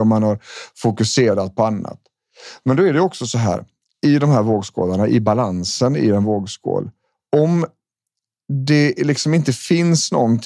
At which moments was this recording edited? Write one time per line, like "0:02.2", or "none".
none